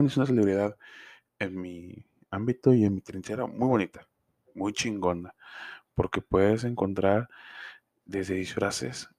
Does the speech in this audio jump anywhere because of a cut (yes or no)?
no